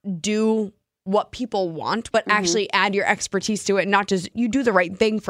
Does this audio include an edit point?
yes; 2 cuts; at 2.1 s, 4.3 s

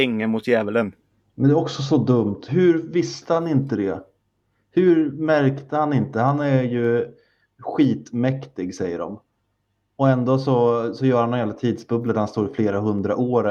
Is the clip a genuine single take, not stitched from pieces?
yes; 0 cuts

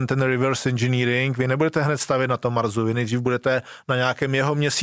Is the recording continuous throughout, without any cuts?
yes; 0 cuts

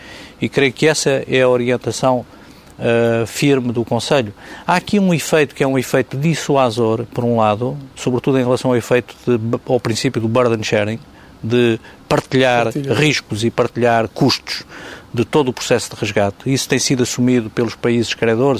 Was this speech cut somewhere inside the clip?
no; 0 cuts

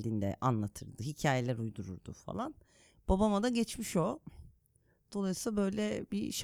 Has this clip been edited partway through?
no; 0 cuts

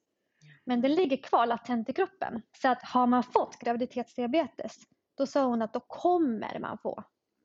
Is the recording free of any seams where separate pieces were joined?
no; 1 cut; at 2.5 s

